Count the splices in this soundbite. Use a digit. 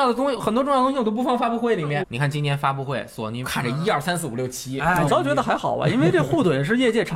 3